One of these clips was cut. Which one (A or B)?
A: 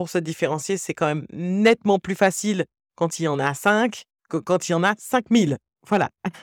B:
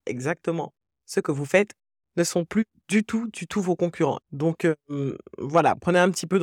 B